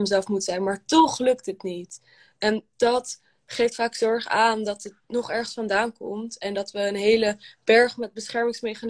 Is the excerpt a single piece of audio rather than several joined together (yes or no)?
yes